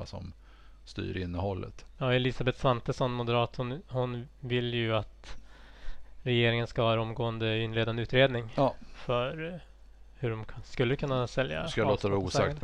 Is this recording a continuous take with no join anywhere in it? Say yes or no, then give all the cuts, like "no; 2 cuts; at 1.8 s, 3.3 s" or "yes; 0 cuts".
no; 1 cut; at 2.0 s